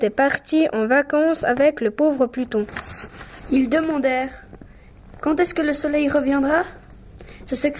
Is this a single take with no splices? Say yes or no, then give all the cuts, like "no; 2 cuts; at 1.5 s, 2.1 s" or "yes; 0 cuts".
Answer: yes; 0 cuts